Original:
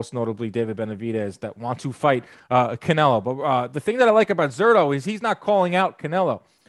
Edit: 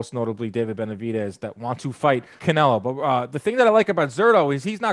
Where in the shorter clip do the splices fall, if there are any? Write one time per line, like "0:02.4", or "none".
0:02.4